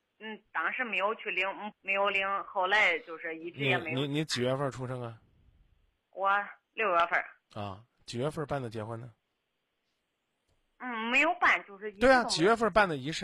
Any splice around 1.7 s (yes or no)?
yes